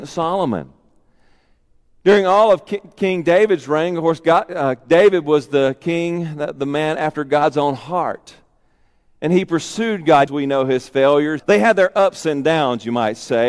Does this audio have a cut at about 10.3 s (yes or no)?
yes